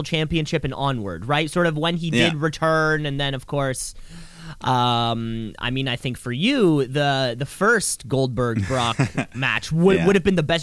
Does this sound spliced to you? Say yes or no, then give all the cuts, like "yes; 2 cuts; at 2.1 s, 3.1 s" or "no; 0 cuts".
no; 0 cuts